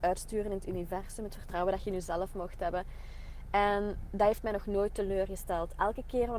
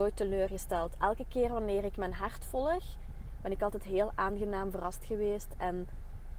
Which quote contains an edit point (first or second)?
second